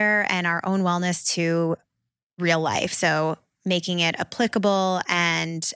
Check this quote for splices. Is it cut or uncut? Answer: uncut